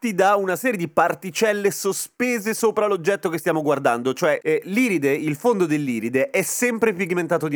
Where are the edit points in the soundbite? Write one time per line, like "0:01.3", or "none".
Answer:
0:04.4